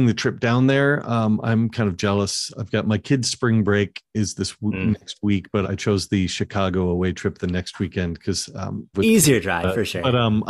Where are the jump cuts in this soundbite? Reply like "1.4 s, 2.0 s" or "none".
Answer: 5.6 s, 8.9 s